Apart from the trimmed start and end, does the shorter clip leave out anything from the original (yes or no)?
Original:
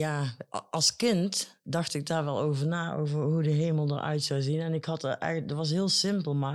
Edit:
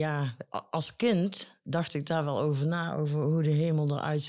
no